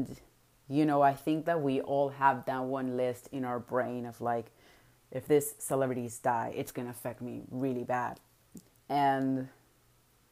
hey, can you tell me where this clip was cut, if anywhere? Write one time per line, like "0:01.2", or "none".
none